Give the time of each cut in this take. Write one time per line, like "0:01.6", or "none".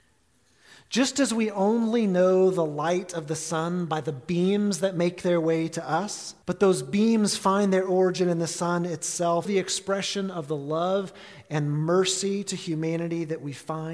0:06.4
0:09.4